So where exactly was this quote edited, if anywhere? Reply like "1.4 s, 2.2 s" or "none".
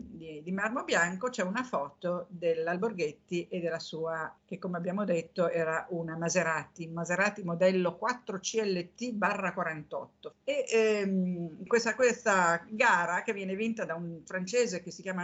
4.4 s, 10.3 s, 11.7 s